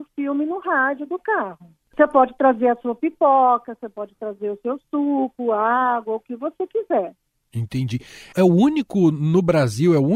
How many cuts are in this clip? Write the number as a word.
zero